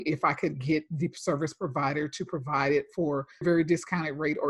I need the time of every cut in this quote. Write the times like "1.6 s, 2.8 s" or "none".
3.4 s